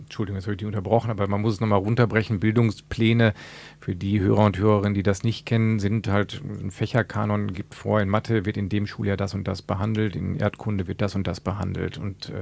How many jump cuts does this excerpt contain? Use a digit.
0